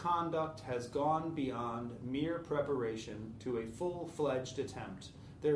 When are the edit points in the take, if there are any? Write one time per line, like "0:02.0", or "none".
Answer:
none